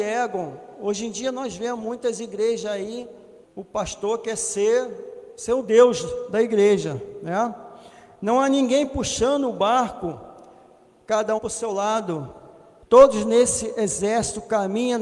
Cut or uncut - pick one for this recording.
cut